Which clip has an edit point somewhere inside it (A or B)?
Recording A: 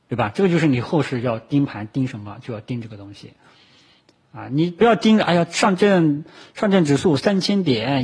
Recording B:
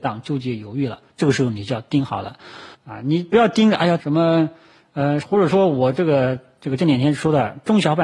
B